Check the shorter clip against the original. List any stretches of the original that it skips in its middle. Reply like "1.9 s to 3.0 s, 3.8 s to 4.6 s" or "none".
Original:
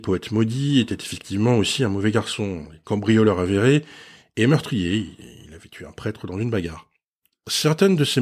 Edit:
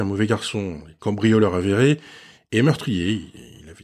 none

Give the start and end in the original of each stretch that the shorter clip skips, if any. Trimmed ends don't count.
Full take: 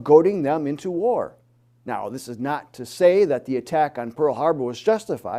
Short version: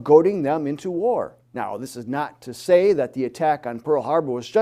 1.4 s to 1.7 s

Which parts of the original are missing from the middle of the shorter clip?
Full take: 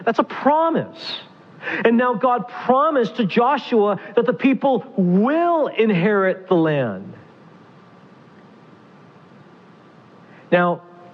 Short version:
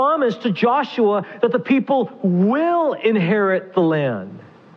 none

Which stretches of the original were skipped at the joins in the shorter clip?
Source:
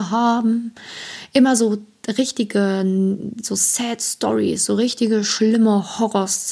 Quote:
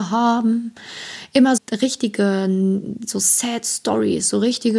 1.6 s to 1.9 s

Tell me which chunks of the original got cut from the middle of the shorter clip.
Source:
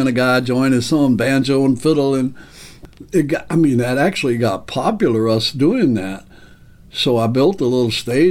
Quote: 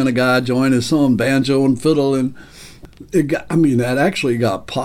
none

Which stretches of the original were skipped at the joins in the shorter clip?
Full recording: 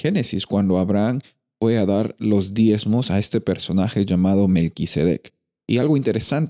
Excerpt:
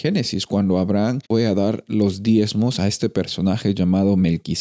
1.2 s to 1.6 s

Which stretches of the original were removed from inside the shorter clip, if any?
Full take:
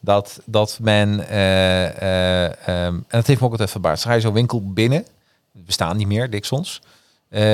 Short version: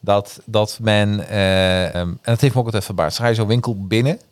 1.9 s to 2.8 s

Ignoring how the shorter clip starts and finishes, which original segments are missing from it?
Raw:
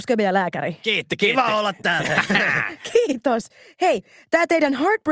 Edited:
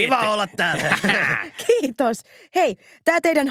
none

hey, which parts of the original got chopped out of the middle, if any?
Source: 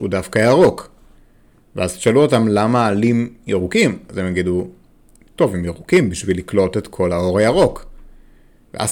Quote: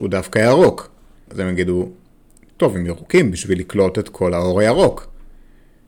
1.3 s to 4.1 s

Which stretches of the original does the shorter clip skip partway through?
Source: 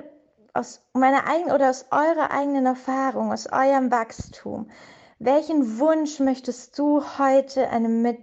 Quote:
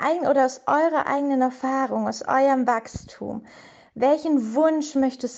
none

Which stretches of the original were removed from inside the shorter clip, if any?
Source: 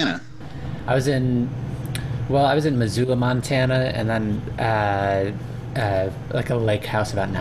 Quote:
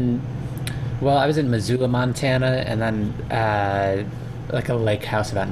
5.7 s to 6.2 s

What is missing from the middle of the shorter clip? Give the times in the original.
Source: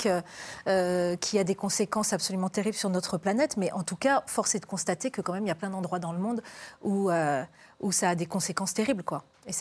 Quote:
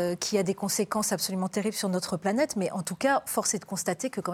none

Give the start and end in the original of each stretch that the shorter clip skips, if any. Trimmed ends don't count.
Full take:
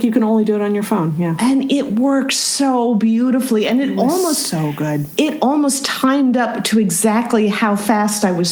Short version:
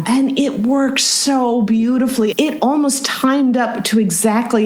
3.6 s to 5.1 s

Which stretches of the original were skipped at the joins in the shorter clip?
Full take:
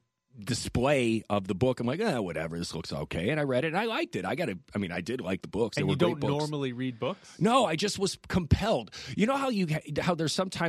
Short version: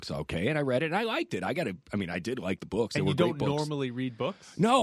none

